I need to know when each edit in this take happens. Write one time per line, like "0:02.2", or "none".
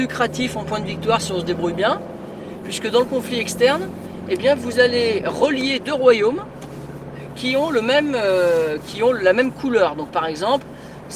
0:05.2